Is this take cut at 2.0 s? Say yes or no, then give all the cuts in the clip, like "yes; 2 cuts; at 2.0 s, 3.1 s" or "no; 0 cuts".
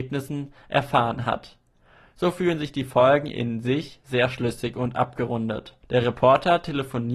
no; 1 cut; at 5.8 s